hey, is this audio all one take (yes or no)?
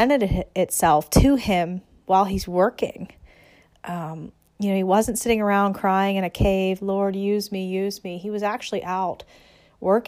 yes